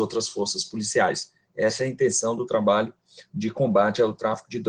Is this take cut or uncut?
uncut